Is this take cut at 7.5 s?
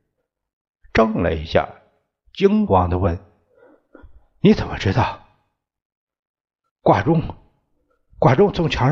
no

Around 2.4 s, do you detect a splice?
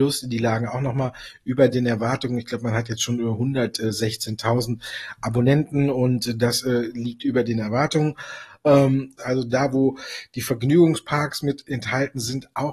no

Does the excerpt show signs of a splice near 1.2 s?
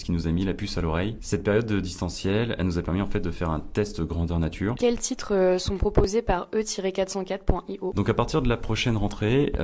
no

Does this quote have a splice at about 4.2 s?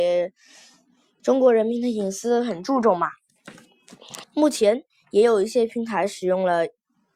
yes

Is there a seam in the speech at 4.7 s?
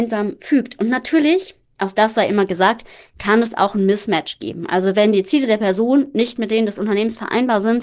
no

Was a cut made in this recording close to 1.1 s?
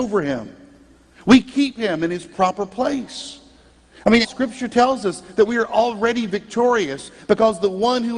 no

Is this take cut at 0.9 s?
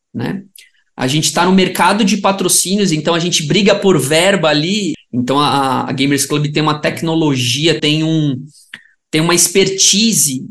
no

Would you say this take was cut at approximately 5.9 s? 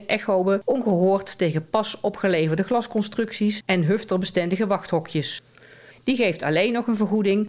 yes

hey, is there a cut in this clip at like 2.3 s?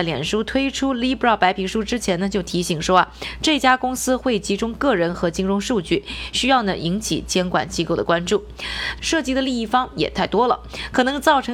no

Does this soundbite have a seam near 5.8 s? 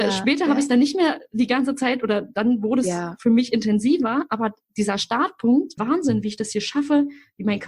yes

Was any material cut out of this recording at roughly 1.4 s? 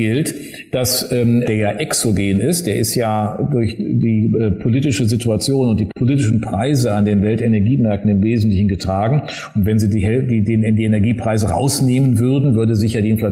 yes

